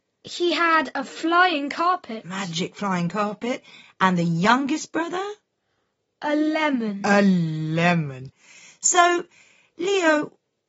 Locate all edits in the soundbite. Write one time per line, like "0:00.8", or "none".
none